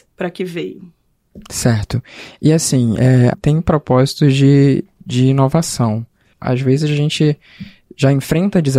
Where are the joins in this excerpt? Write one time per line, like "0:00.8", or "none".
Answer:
0:03.3
0:06.3